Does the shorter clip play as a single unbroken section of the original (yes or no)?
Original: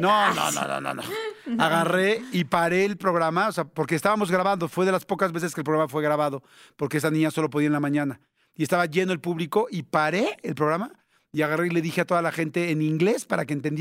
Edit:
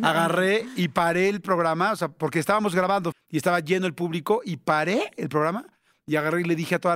no